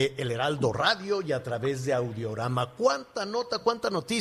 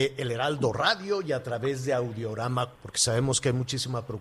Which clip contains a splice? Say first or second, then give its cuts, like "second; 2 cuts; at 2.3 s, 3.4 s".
second; 1 cut; at 2.7 s